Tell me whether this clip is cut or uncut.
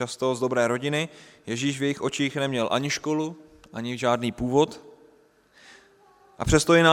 uncut